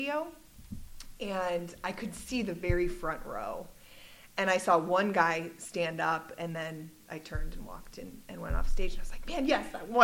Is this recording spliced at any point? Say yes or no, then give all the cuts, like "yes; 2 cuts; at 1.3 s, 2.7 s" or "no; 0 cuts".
no; 0 cuts